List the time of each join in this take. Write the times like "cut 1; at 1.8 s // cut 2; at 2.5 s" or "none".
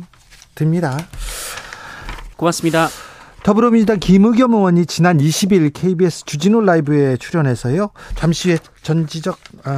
cut 1; at 2.3 s // cut 2; at 8.1 s